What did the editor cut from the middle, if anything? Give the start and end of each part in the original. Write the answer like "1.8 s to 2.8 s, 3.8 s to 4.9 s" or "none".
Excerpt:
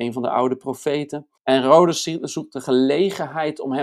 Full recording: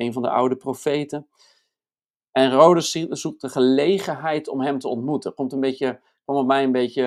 1.4 s to 2.3 s